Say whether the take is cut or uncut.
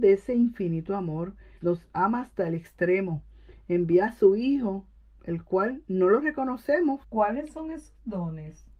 cut